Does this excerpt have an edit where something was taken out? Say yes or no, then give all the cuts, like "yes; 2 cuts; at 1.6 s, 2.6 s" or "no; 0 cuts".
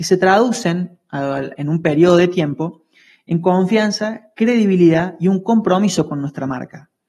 no; 0 cuts